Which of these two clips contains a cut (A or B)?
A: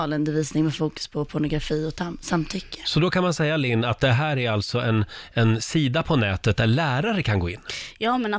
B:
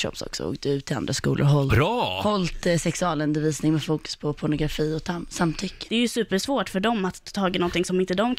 B